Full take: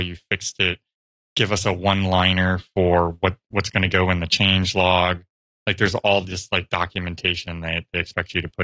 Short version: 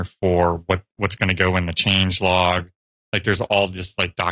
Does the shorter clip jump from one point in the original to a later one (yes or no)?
no